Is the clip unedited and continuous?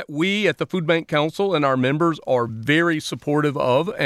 yes; 0 cuts

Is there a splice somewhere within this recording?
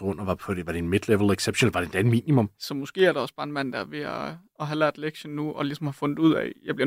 yes; 1 cut; at 2.5 s

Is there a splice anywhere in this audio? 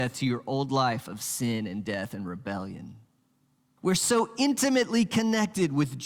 yes; 1 cut; at 3.8 s

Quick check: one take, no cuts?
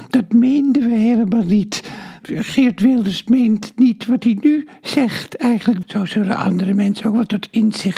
no; 2 cuts; at 2.2 s, 5.8 s

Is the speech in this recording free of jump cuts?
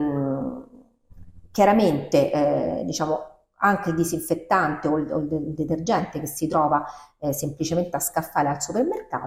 yes; 0 cuts

